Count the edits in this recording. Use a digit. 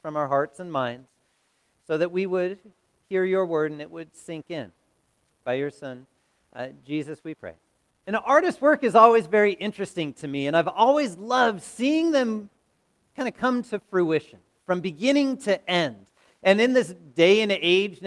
1